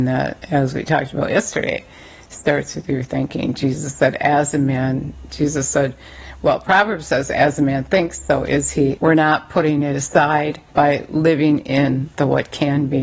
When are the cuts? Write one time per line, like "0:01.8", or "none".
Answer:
0:09.0
0:10.7